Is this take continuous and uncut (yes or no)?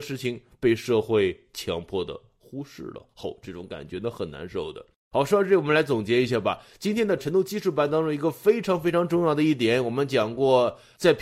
yes